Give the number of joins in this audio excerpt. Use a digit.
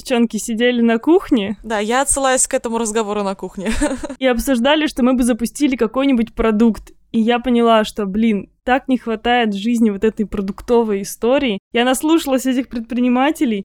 0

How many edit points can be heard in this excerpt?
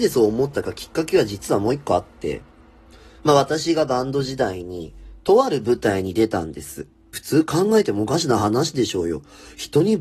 1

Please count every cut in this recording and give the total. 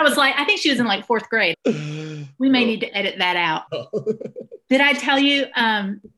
2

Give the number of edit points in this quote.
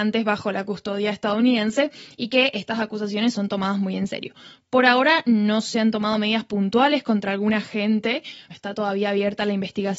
1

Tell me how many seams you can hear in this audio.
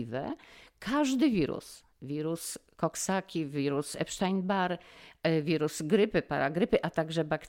0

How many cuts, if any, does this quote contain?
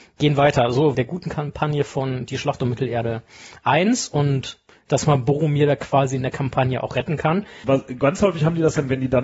2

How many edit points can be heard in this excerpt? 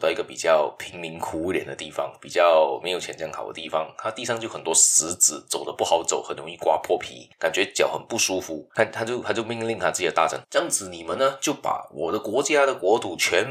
2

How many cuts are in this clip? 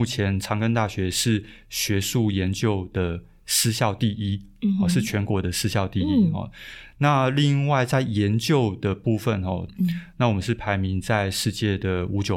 2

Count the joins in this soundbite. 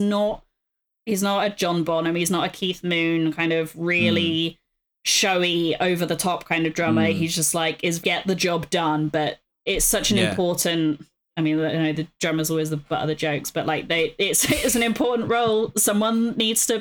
1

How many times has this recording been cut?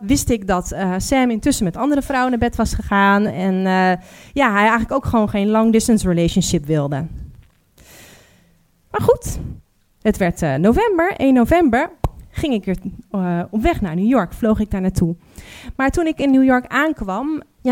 0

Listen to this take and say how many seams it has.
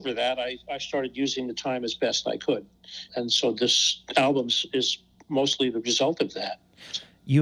1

